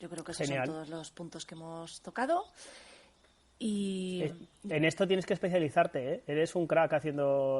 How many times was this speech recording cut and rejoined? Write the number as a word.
zero